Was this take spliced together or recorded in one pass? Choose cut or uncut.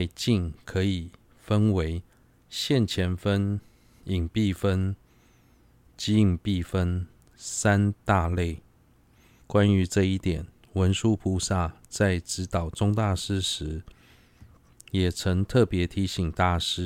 cut